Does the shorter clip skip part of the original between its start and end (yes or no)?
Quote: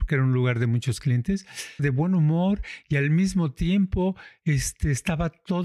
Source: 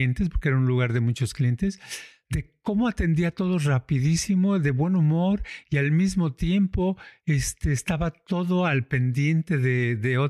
yes